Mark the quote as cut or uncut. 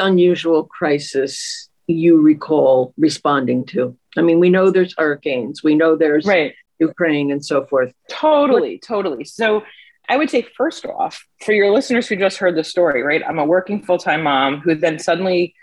uncut